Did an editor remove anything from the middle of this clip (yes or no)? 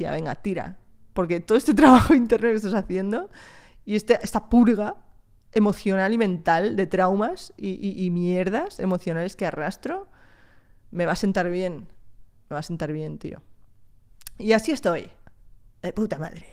no